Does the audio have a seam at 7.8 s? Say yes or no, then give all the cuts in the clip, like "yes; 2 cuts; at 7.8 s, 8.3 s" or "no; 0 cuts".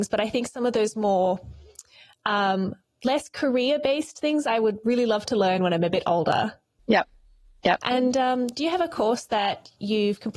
yes; 1 cut; at 7.8 s